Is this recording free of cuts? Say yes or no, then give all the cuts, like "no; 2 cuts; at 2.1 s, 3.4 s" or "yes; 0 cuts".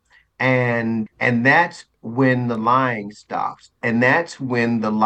no; 1 cut; at 1.1 s